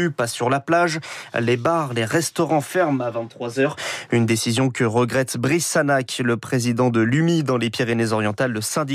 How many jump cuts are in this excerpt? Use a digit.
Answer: 0